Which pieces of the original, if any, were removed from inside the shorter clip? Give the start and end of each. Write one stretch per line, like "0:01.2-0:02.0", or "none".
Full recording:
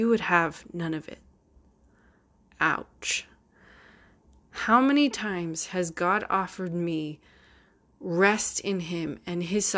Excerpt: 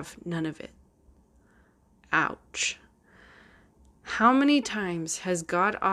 none